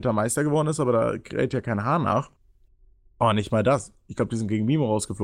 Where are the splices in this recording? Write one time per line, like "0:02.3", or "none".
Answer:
none